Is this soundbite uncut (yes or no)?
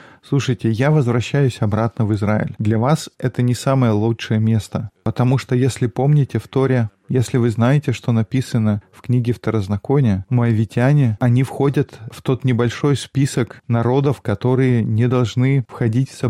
yes